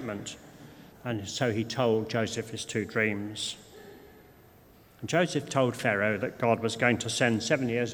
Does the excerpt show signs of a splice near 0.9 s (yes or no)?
yes